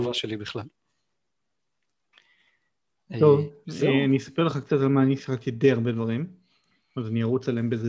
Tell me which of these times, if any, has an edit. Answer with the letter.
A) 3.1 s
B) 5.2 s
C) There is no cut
B